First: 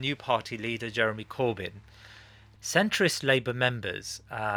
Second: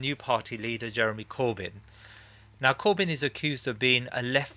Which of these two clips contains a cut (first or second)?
first